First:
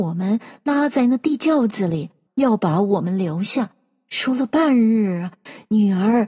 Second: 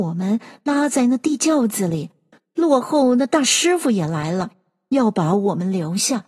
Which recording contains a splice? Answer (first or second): first